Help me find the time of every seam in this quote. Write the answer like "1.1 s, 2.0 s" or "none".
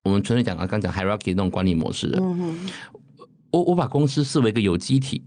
none